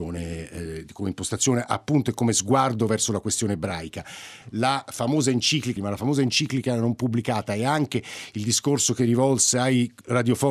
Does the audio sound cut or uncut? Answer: cut